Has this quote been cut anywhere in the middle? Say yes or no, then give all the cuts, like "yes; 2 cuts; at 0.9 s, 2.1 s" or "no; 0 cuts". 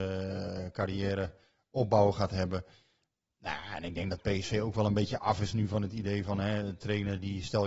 no; 0 cuts